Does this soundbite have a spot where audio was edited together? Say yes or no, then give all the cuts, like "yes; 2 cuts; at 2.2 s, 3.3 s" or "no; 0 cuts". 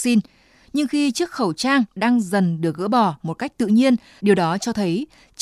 yes; 1 cut; at 4.2 s